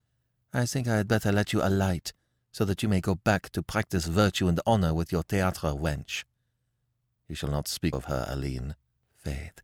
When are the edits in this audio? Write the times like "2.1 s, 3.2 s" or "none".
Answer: 7.9 s